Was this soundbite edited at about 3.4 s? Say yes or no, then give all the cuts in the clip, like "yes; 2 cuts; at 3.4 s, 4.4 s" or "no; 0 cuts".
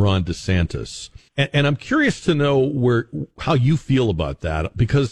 no; 1 cut; at 1.3 s